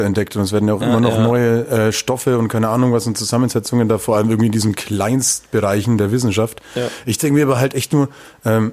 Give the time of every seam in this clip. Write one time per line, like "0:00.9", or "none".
none